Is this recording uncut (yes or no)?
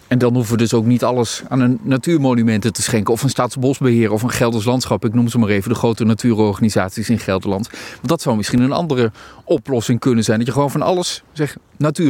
yes